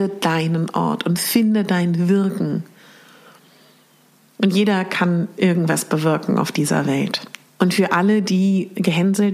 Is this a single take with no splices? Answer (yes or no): no